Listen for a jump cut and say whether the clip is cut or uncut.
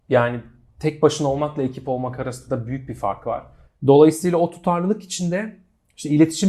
cut